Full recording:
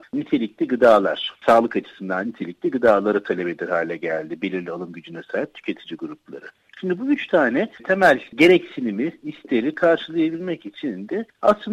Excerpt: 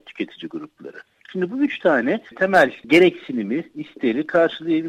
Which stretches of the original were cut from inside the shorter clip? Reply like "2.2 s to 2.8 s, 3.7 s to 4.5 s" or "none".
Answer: none